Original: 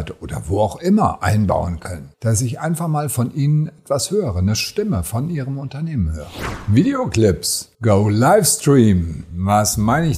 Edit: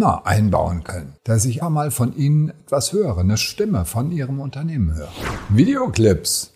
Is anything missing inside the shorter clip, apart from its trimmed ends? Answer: yes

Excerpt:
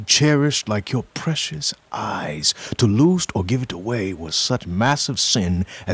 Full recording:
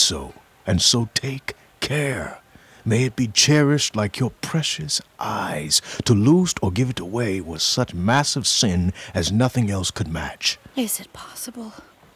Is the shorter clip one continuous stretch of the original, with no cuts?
yes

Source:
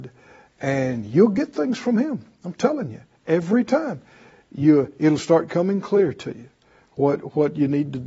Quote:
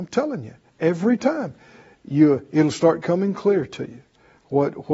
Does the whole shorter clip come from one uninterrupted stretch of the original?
yes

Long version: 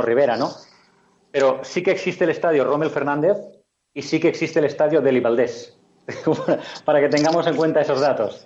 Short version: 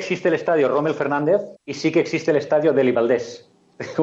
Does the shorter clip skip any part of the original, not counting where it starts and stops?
yes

